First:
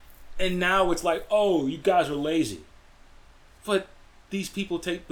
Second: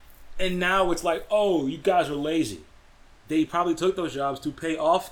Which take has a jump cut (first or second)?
second